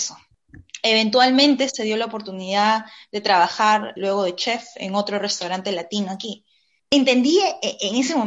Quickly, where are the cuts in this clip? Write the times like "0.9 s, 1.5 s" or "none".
4.0 s, 6.8 s